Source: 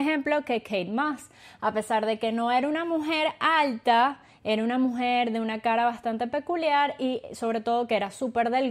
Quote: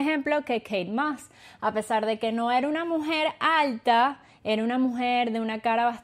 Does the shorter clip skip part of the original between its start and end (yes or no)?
no